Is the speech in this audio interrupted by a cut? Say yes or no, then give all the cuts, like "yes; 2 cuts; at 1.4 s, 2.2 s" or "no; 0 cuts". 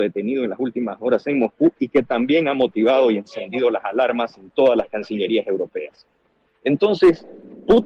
yes; 1 cut; at 6.5 s